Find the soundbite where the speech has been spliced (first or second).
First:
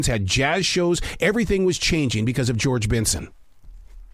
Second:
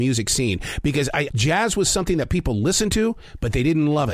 second